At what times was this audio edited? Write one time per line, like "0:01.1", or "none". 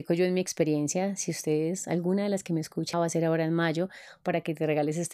0:02.9